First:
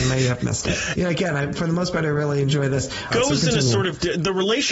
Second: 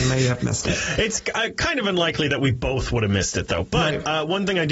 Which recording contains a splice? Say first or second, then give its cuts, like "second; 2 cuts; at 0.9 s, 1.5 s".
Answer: first; 2 cuts; at 0.9 s, 3.1 s